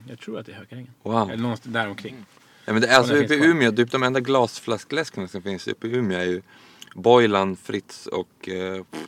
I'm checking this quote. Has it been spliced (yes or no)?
no